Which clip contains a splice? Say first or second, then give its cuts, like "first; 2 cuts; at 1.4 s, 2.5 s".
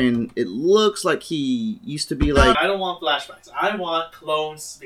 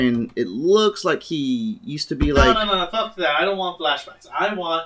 first; 1 cut; at 2.5 s